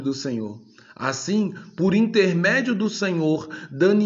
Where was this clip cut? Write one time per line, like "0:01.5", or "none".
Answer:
none